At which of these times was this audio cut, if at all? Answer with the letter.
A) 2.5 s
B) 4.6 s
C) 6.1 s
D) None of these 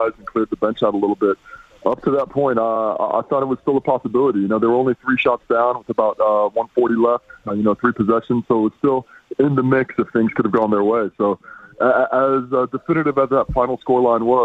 D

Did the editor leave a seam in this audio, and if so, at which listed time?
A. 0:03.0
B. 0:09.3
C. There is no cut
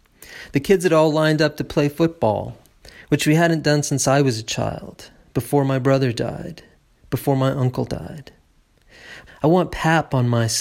B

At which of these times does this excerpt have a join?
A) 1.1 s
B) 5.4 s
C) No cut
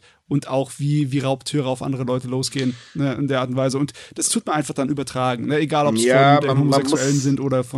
C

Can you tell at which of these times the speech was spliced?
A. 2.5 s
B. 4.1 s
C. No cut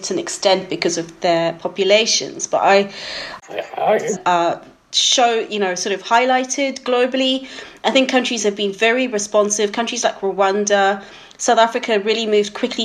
B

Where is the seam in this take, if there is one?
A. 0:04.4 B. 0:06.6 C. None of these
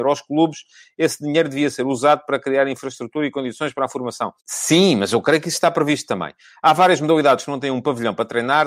A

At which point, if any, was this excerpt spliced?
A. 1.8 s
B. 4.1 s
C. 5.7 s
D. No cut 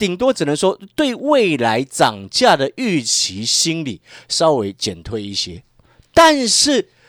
D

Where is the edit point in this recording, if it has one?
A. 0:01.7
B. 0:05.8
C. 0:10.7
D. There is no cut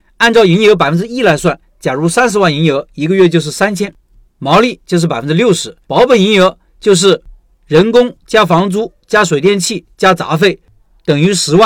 B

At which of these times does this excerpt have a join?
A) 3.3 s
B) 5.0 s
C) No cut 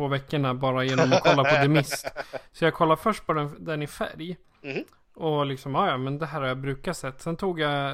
C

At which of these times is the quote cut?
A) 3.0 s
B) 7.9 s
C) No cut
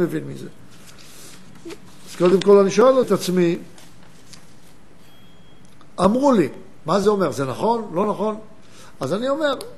A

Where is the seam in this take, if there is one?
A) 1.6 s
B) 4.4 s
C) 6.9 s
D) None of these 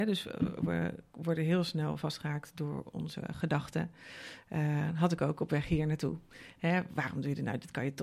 D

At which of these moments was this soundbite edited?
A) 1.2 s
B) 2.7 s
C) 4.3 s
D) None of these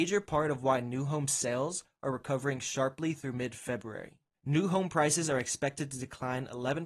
C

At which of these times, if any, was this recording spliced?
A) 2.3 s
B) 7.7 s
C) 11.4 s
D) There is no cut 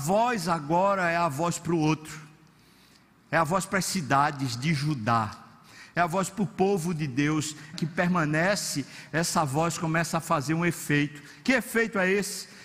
B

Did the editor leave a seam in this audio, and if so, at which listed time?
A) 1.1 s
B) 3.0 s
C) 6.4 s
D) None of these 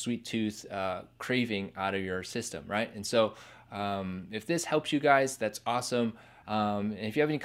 C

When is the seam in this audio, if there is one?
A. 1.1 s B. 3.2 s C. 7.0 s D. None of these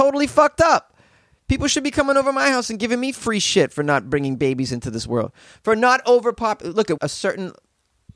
C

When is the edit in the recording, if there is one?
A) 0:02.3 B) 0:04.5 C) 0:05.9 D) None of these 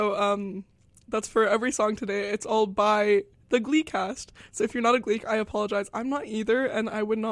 D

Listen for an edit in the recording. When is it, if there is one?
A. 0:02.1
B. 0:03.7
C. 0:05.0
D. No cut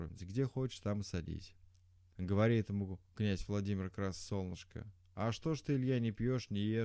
A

